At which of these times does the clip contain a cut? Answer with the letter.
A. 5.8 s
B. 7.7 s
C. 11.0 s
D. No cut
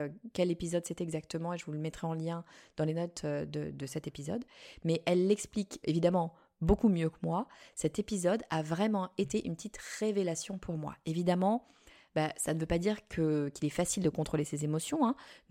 A